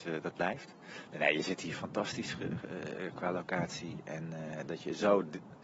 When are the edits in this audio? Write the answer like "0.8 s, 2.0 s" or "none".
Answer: none

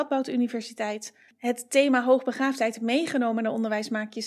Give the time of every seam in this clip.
1.3 s

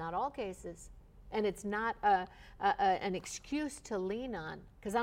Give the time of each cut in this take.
none

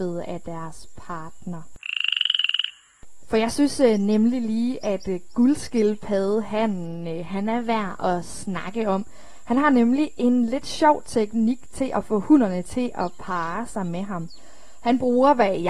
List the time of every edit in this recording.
3.2 s

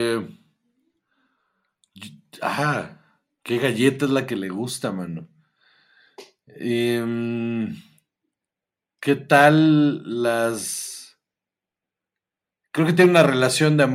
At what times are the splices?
none

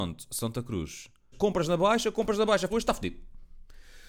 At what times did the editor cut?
1.3 s, 2.7 s

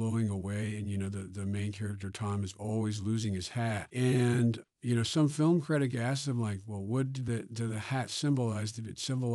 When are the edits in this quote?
4.6 s

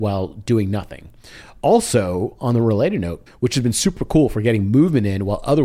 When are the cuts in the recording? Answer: 3.3 s

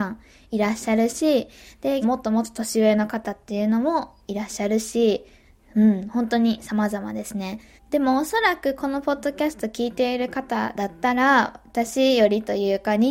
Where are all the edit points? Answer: 2.0 s, 7.8 s

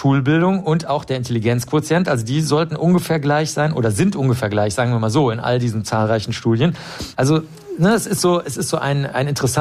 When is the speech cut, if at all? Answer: 7.1 s

